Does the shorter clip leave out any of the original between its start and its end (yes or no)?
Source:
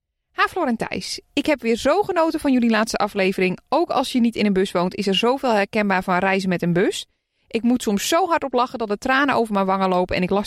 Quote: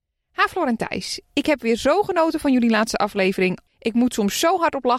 yes